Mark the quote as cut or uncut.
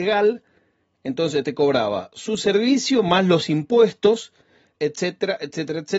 cut